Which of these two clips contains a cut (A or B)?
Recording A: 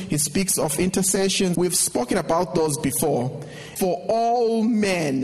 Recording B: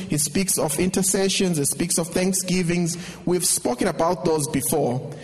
A